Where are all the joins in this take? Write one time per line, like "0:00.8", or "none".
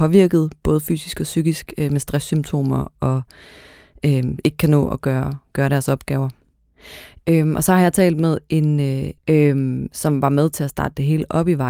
0:09.2